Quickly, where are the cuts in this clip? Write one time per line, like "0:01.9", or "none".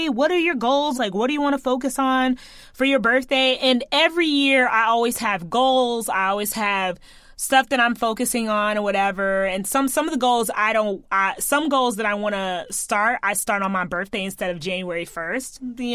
0:00.9